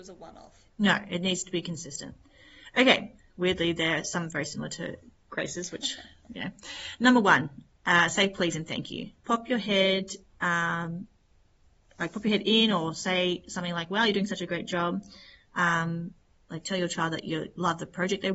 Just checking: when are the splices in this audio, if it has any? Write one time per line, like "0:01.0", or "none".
0:03.2
0:09.2